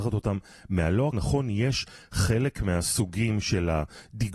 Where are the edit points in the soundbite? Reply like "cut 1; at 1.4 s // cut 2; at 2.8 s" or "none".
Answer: cut 1; at 1.1 s